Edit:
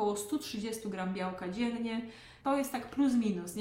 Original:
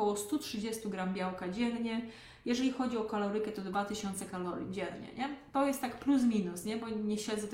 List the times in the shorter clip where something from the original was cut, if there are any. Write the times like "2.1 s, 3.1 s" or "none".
2.4 s